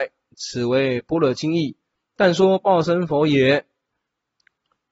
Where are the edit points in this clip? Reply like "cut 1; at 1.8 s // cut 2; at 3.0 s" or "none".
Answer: none